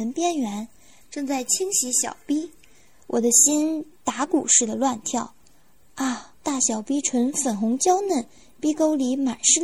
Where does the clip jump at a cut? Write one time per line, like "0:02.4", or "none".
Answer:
0:01.0
0:06.3